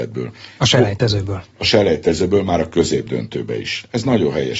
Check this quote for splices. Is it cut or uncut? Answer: uncut